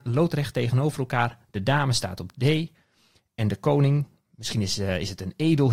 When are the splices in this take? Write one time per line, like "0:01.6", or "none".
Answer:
none